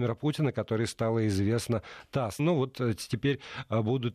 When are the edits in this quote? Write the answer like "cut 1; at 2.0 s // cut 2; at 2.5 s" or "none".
cut 1; at 2.4 s